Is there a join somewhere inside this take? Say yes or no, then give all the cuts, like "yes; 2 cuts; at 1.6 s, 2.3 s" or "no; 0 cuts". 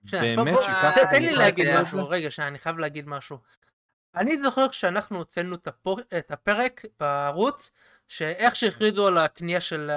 no; 0 cuts